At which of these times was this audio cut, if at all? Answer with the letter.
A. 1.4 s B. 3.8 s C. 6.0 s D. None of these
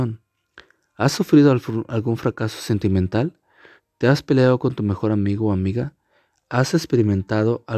B